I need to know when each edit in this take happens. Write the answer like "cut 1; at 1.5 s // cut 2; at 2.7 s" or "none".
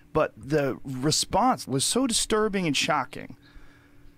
cut 1; at 1.7 s